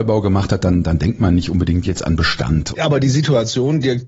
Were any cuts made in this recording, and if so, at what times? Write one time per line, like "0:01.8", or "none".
none